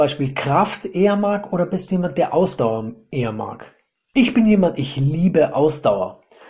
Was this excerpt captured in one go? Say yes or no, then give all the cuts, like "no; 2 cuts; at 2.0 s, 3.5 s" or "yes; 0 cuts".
yes; 0 cuts